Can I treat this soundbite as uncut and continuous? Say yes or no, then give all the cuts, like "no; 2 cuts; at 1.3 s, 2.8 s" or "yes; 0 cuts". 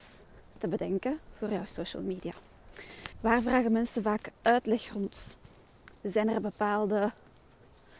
no; 1 cut; at 3.1 s